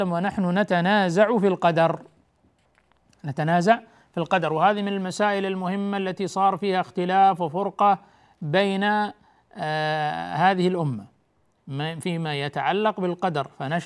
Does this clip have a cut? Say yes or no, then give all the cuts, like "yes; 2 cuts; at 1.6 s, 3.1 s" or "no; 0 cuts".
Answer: no; 0 cuts